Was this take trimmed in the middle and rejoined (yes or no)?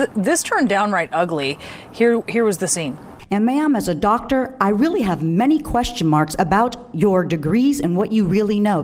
no